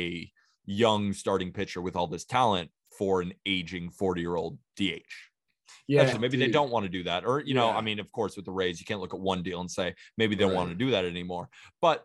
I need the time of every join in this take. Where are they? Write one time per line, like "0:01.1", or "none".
0:06.1

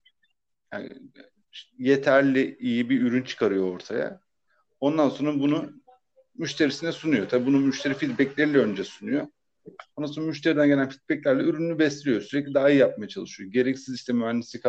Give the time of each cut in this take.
none

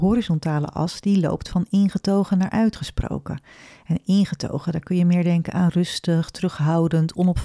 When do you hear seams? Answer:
none

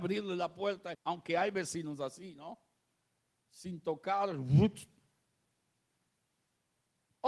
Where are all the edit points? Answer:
0:00.9

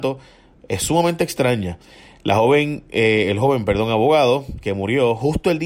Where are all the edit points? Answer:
none

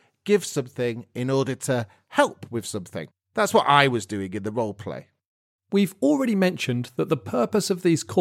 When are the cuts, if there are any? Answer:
0:03.2
0:05.6

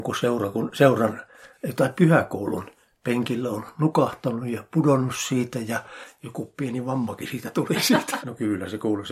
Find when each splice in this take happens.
0:08.2

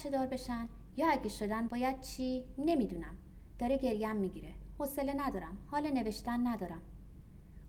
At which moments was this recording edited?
0:01.7

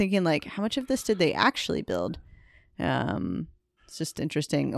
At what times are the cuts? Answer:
0:03.8

